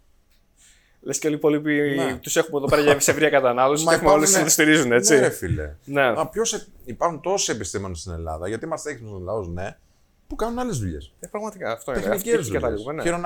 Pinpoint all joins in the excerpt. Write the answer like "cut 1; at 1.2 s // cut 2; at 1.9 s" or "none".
none